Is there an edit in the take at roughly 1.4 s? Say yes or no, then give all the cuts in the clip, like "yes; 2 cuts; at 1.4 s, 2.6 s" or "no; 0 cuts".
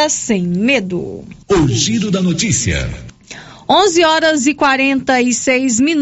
yes; 1 cut; at 1.4 s